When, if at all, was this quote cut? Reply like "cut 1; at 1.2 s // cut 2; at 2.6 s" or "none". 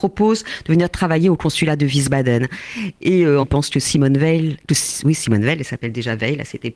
cut 1; at 3.4 s